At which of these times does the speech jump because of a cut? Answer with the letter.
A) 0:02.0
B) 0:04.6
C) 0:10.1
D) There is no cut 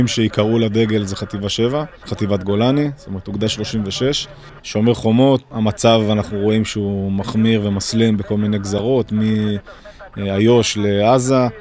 B